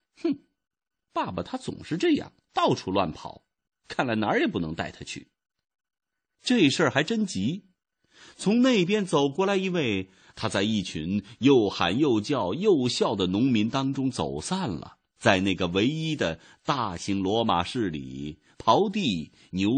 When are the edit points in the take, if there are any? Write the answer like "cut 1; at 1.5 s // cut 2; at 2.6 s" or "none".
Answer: cut 1; at 10.3 s // cut 2; at 15.1 s // cut 3; at 18.5 s